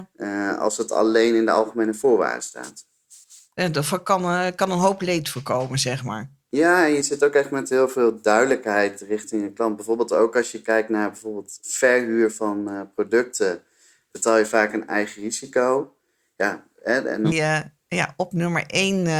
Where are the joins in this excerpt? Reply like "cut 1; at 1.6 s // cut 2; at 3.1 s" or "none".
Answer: cut 1; at 17.3 s